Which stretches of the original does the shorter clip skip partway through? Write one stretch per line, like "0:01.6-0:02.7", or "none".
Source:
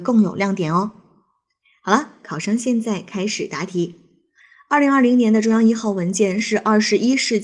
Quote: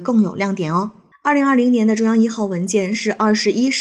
0:01.1-0:04.6